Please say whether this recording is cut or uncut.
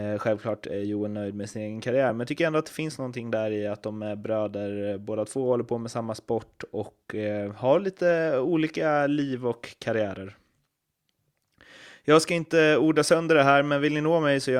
uncut